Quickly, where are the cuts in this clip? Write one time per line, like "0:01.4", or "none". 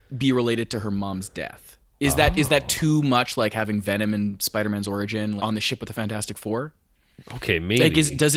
0:05.4